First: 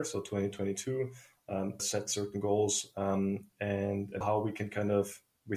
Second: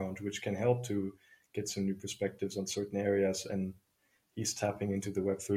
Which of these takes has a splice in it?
first; 2 cuts; at 1.8 s, 4.2 s

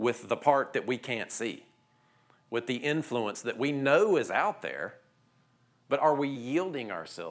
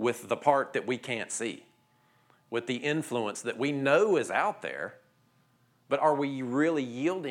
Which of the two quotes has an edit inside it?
first; 1 cut; at 6.3 s

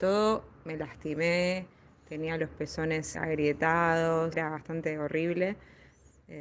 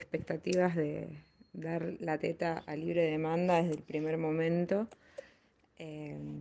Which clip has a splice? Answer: first; 2 cuts; at 3.1 s, 4.3 s

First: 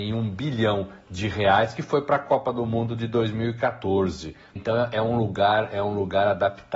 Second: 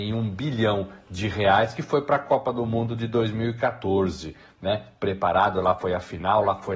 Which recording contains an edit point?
first; 1 cut; at 4.6 s

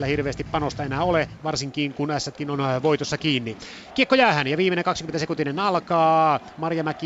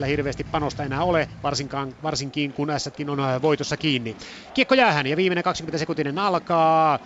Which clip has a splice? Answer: first; 1 cut; at 1.4 s

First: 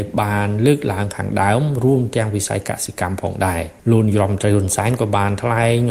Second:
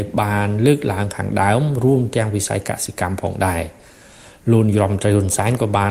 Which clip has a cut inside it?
first; 1 cut; at 3.8 s

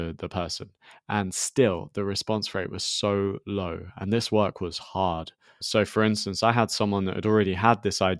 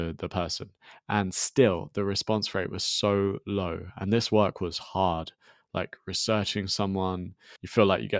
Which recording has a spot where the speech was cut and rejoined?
first; 1 cut; at 5.6 s

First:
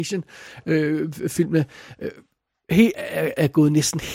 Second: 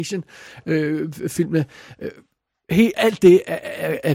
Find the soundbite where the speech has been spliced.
first; 1 cut; at 2.9 s

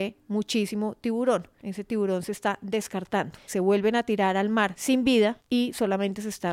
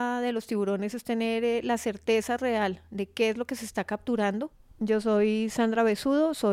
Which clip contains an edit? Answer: first; 2 cuts; at 1.6 s, 3.5 s

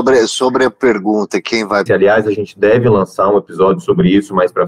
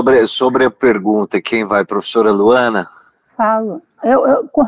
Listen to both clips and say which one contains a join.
first; 1 cut; at 1.9 s

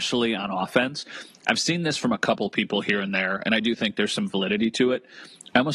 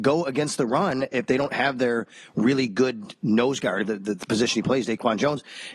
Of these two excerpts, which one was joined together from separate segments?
second; 1 cut; at 3.8 s

